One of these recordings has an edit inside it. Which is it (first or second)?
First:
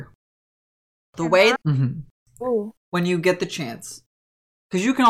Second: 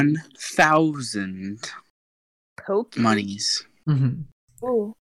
first